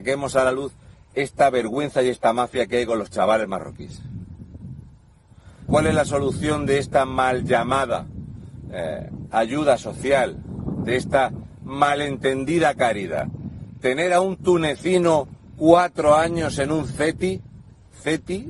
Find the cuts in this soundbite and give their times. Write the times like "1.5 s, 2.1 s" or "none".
5.7 s